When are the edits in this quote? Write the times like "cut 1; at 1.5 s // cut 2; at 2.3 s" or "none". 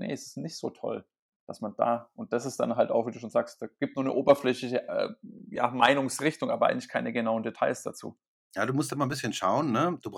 none